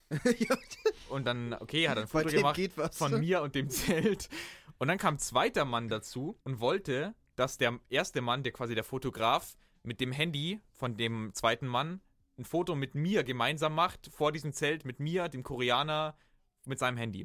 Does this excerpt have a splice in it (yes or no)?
yes